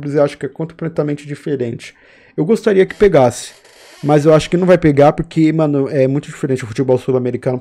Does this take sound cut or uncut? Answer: uncut